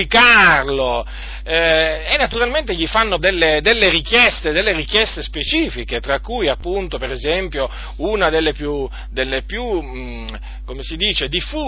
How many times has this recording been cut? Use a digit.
1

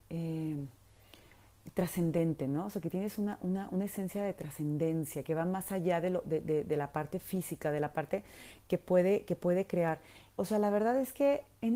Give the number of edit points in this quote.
1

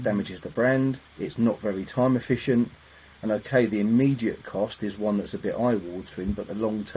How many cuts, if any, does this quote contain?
1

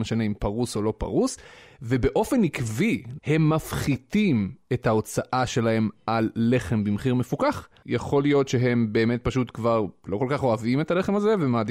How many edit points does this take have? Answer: 2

